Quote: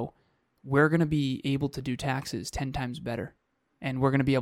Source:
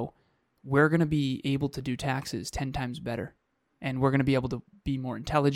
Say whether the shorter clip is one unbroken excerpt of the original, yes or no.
yes